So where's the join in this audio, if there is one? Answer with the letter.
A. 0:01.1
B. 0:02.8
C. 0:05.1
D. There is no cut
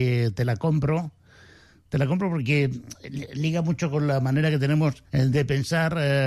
C